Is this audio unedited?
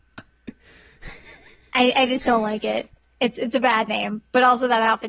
yes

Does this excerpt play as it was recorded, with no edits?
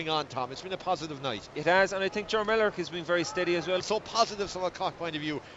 no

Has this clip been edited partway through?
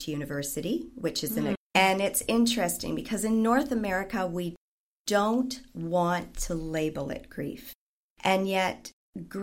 yes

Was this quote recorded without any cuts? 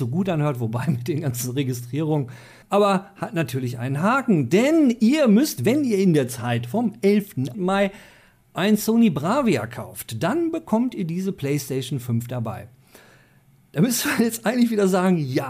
no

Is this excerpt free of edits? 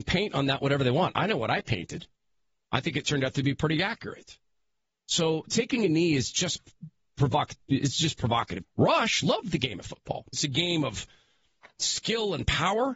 no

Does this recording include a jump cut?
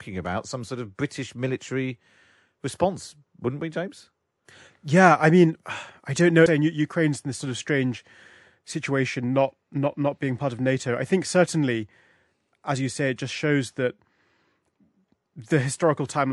yes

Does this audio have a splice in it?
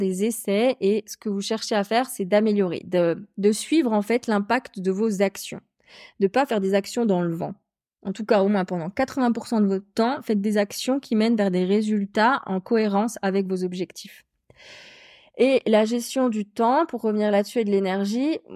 no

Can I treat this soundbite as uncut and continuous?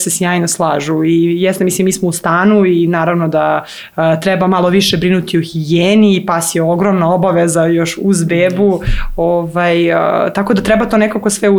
yes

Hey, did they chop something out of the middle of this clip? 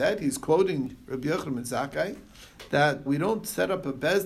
yes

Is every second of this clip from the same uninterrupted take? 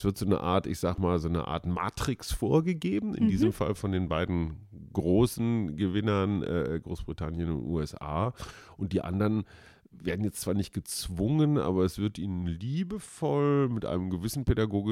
yes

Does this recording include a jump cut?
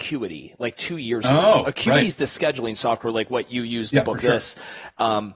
no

